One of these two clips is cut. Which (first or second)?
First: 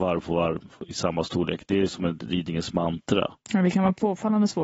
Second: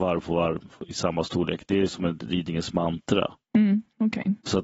first